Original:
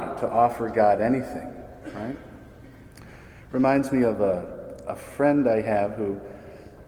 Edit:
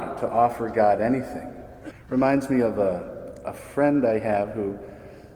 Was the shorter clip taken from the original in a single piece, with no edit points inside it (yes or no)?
no